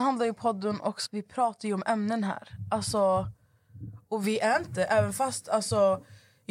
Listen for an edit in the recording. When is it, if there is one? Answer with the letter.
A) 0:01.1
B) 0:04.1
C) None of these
A